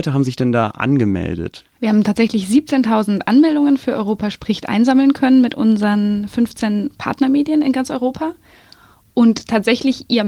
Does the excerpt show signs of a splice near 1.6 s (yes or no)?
yes